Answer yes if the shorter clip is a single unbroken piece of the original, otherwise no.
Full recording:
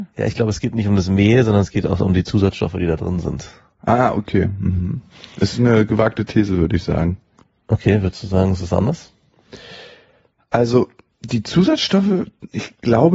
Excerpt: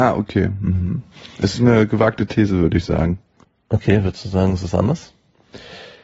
yes